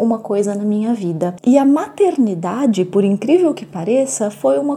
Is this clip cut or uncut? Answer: cut